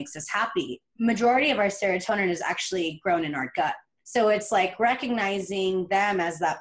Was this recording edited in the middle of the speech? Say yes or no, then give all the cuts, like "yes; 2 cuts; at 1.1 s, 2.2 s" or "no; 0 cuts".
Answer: yes; 1 cut; at 4.0 s